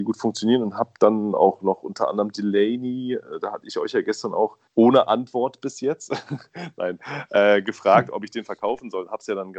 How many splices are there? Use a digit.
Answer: 1